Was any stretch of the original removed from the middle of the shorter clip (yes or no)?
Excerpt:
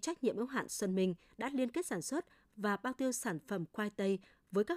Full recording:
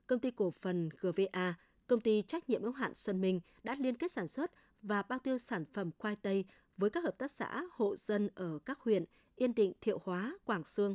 no